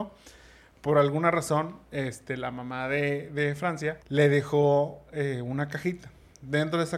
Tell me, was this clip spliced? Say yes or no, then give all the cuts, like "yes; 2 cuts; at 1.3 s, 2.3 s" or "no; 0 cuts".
yes; 1 cut; at 4.0 s